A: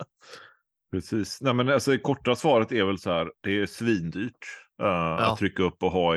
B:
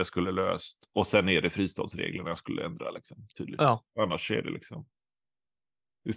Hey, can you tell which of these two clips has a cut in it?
A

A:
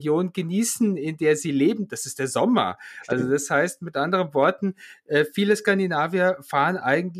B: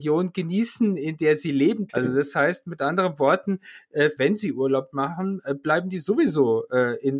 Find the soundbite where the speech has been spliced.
B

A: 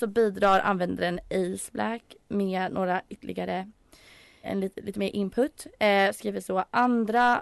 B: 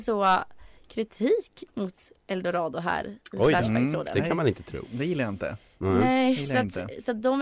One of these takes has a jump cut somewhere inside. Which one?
A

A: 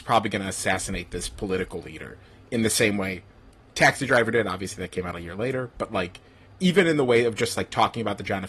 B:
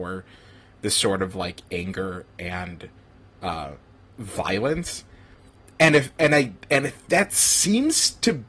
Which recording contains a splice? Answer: A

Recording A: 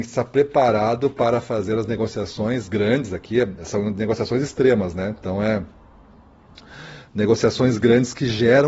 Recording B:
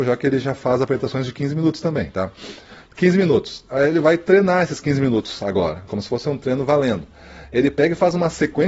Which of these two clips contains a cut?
B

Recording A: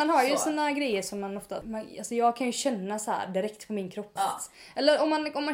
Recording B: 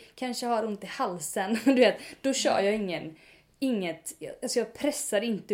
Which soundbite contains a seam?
A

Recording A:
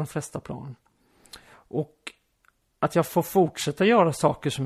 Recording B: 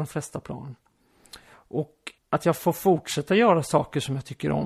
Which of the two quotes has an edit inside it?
B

